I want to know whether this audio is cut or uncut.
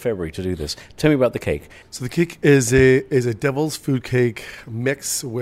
cut